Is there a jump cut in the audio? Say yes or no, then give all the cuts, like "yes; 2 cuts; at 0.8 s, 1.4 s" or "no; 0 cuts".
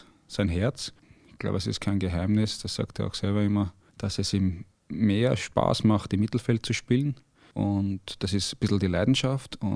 no; 0 cuts